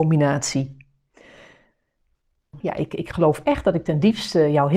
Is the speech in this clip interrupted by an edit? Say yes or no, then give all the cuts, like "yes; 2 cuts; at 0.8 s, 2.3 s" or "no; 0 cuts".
yes; 1 cut; at 2.6 s